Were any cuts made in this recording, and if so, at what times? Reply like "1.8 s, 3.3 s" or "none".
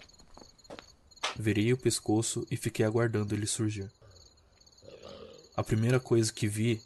5.5 s